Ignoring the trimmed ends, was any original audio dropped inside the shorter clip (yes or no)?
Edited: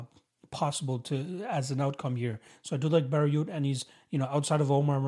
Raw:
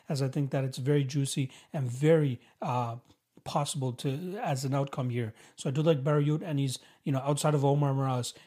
no